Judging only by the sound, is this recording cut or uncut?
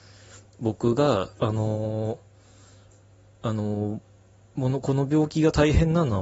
cut